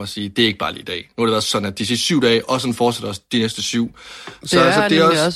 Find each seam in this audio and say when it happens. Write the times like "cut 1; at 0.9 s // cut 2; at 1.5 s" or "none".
none